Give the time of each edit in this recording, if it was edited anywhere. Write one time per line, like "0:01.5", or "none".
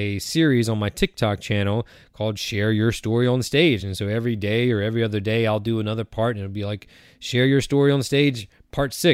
none